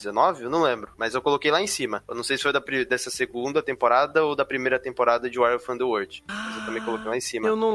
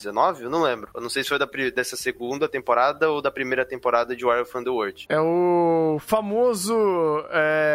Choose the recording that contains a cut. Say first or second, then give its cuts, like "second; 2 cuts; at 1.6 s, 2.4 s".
second; 2 cuts; at 0.9 s, 5.1 s